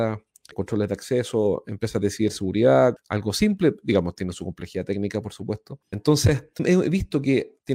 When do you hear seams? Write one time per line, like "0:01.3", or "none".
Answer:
0:03.0
0:05.8